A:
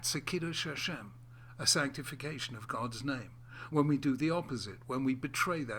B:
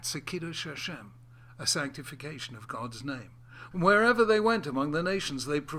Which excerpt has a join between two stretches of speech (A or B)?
B